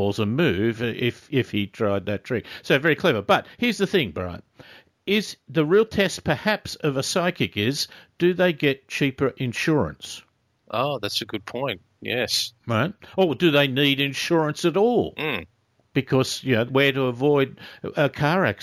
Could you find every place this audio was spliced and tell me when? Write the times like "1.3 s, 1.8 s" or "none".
12.6 s, 16.7 s